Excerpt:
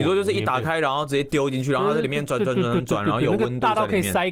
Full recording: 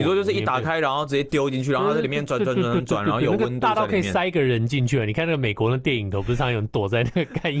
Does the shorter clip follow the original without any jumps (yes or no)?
yes